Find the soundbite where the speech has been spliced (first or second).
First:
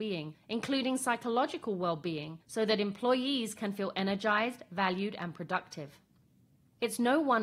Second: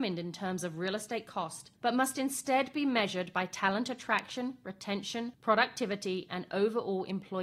second